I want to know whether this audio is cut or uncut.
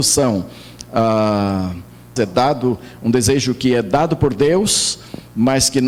cut